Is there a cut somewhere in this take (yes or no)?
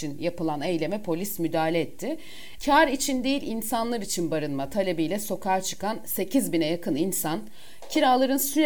yes